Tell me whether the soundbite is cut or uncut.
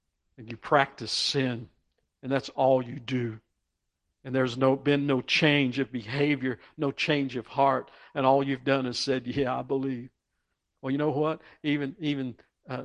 uncut